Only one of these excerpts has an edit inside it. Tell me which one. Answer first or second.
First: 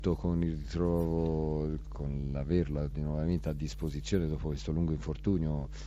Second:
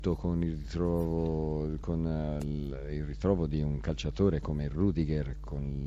first